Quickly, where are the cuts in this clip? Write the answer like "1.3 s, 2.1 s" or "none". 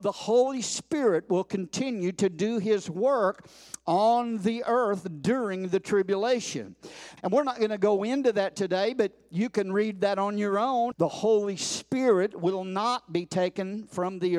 7.2 s, 10.9 s